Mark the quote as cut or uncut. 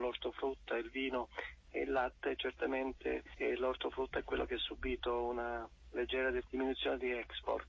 uncut